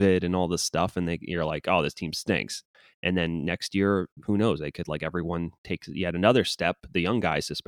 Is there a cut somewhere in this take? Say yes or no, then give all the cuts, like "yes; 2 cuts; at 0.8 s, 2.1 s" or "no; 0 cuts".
no; 0 cuts